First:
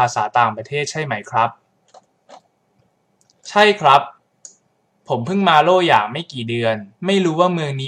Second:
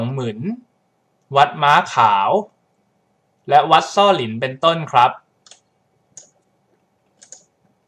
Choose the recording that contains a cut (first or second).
first